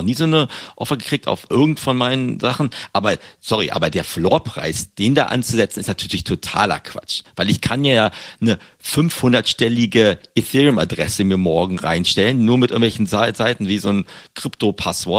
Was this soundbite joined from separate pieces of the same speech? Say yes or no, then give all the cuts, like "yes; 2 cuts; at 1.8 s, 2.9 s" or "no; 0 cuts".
no; 0 cuts